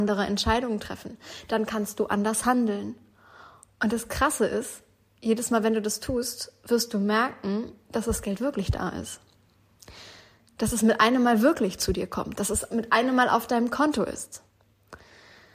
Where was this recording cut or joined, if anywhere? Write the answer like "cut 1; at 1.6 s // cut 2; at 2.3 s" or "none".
none